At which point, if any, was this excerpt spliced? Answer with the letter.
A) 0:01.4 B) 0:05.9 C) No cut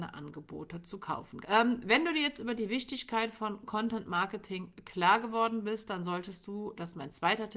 A